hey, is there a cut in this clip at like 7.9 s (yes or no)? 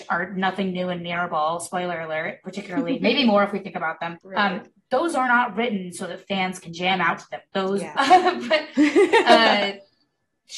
yes